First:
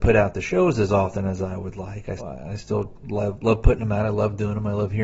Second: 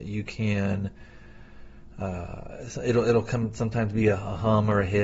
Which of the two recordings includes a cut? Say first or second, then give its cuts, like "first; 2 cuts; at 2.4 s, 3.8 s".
first; 1 cut; at 2.2 s